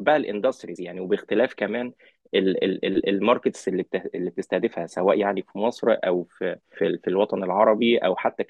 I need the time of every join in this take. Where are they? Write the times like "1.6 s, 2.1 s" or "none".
6.7 s